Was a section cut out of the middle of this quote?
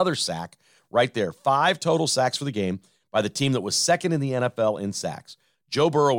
no; 0 cuts

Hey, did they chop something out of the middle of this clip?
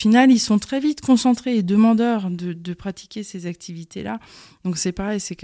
no; 0 cuts

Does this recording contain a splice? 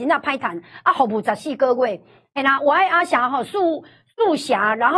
no; 0 cuts

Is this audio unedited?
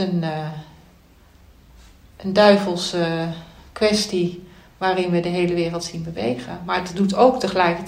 yes; 0 cuts

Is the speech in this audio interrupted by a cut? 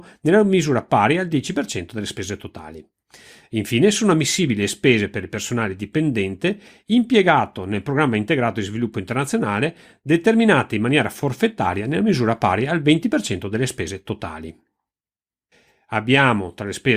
no; 0 cuts

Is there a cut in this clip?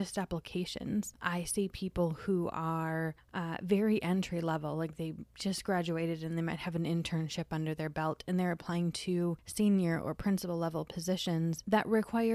no; 0 cuts

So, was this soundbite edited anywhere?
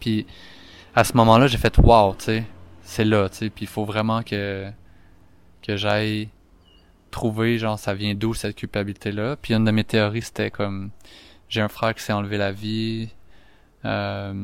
no; 0 cuts

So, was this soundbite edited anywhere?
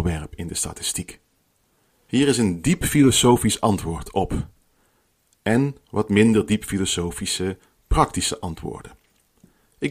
no; 0 cuts

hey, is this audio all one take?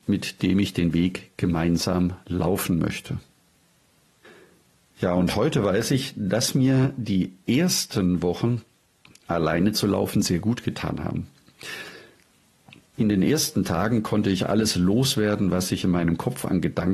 no; 1 cut; at 12.9 s

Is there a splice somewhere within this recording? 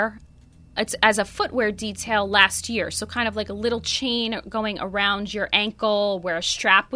no; 0 cuts

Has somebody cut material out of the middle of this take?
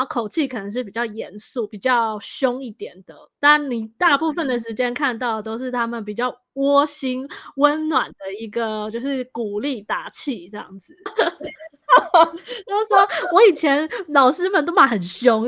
yes; 1 cut; at 11.1 s

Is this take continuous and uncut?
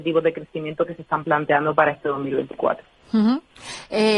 yes; 0 cuts

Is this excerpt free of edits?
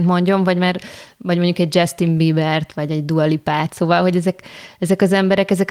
yes; 0 cuts

